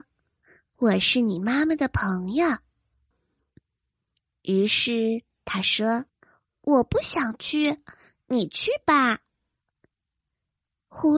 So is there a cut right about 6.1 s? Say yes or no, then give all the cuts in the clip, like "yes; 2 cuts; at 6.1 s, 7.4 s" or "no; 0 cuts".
yes; 2 cuts; at 3.1 s, 6.1 s